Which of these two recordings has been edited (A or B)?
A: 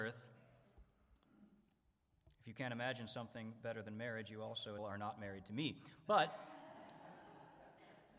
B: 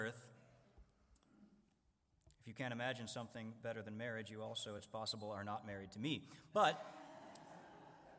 A